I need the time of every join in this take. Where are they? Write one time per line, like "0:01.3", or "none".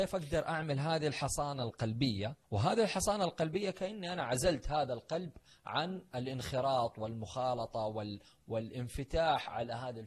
0:02.4